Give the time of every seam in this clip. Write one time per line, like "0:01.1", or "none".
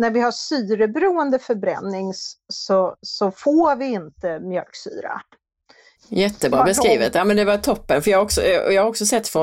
0:06.0